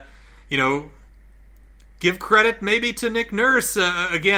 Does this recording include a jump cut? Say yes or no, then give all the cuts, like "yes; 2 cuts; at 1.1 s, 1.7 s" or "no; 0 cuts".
no; 0 cuts